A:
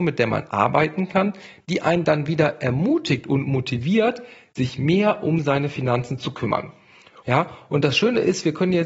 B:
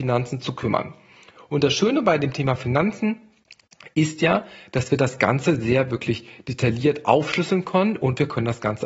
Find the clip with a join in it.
A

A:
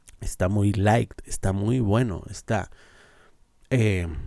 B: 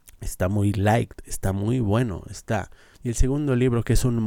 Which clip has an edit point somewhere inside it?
B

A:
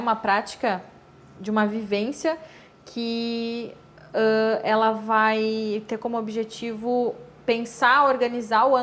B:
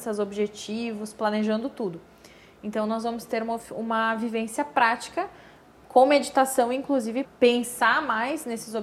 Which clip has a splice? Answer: B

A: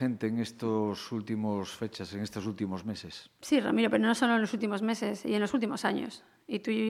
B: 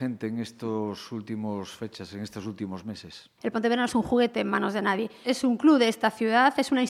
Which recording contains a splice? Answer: B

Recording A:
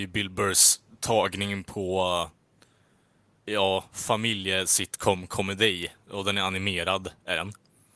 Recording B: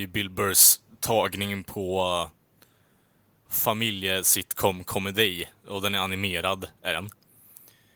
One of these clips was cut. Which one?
B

